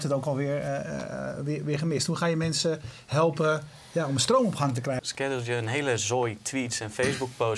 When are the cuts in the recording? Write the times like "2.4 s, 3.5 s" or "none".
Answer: 5.0 s